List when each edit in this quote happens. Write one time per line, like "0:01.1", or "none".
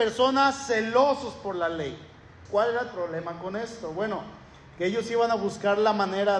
0:02.5